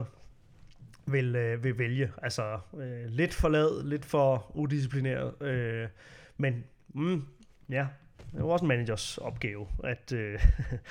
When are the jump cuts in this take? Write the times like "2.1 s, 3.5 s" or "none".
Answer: none